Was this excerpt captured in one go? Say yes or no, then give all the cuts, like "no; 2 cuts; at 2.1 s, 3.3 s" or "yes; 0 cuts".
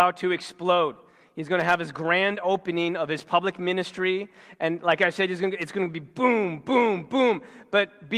yes; 0 cuts